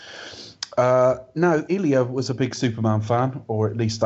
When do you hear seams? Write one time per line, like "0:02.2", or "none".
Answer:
0:01.7